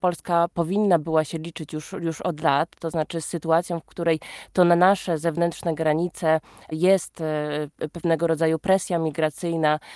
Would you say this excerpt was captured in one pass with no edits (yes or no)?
yes